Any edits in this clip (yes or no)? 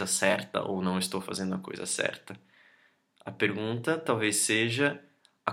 no